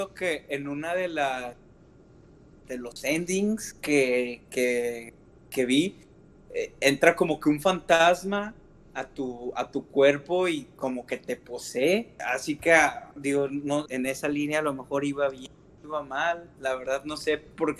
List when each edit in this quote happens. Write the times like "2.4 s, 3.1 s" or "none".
2.5 s, 12.2 s, 13.9 s